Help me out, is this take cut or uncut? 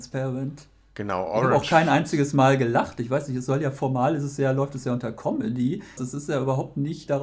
cut